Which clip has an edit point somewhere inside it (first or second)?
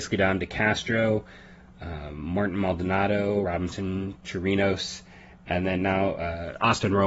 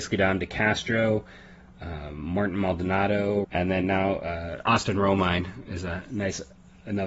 second